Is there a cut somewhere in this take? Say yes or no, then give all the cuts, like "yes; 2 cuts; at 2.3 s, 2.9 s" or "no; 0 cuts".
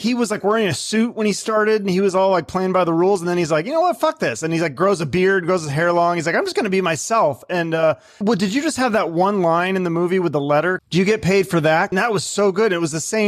yes; 3 cuts; at 8.2 s, 10.8 s, 11.9 s